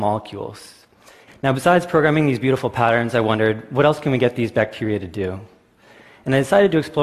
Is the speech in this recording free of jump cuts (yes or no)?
no